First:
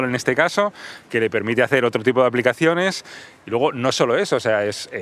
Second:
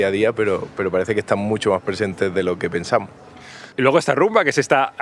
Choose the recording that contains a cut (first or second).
second